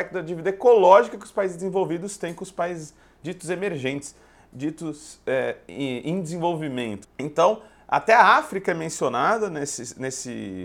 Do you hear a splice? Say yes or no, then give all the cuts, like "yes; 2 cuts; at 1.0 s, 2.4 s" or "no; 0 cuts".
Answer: yes; 1 cut; at 7.0 s